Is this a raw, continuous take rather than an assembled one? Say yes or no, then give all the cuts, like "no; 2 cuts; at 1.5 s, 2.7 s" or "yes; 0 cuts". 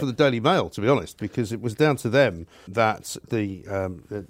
no; 1 cut; at 2.7 s